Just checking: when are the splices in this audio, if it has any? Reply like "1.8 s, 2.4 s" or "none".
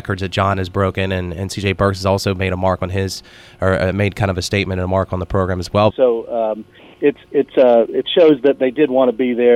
5.9 s